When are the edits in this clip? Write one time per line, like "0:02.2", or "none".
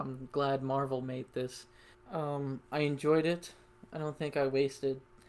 0:01.9